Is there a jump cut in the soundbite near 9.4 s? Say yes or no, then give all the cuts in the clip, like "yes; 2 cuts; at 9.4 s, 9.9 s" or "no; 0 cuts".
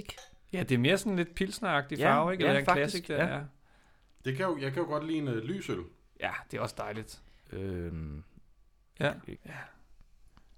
yes; 2 cuts; at 7.4 s, 9.4 s